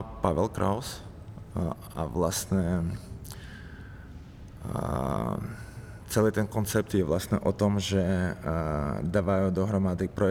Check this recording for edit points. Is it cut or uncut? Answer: uncut